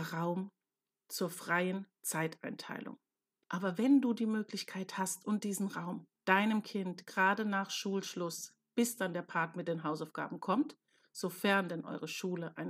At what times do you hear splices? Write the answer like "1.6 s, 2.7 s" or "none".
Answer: 3.4 s, 6.2 s